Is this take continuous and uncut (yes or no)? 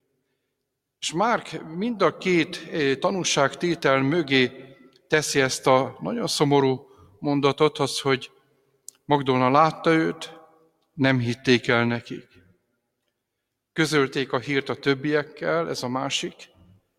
yes